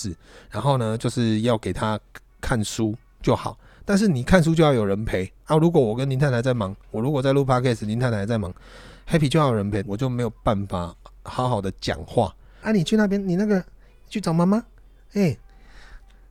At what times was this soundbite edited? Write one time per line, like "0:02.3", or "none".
0:09.8
0:12.6